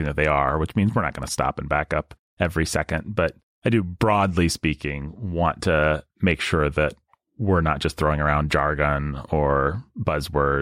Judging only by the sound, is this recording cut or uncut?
uncut